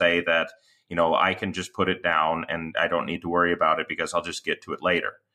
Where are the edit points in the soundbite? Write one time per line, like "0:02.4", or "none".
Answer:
none